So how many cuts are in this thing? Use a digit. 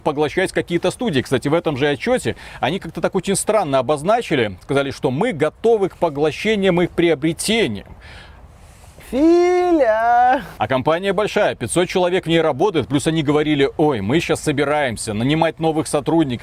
2